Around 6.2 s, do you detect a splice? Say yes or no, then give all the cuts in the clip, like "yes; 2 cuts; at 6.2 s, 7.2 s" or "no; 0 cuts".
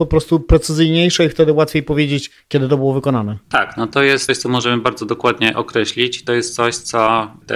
no; 1 cut; at 3.4 s